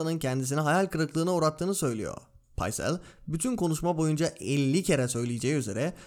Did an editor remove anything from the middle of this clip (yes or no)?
no